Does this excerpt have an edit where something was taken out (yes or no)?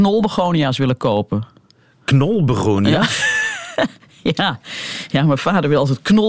no